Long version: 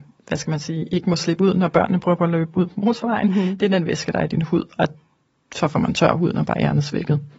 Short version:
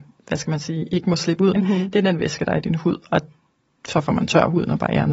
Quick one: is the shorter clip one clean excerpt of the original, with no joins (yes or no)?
no